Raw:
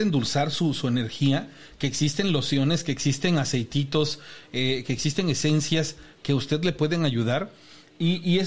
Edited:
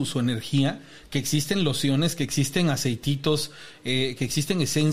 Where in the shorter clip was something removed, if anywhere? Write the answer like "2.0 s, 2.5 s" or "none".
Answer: none